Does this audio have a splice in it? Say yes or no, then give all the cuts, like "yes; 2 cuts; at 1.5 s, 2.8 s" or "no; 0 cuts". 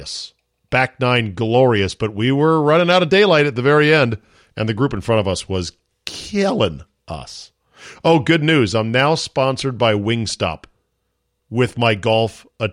no; 0 cuts